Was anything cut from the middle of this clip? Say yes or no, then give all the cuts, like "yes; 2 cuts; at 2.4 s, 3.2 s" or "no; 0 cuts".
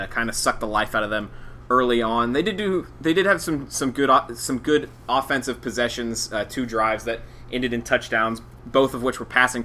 no; 0 cuts